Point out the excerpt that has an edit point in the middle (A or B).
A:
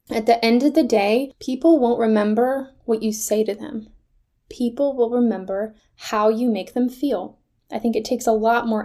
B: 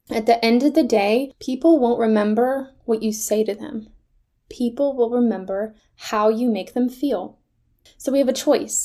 A